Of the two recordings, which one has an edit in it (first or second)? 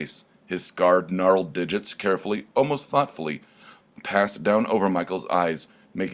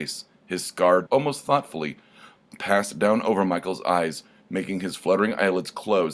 second